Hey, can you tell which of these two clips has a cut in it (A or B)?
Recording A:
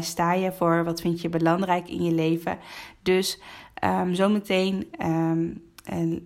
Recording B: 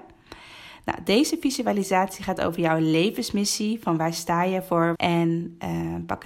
B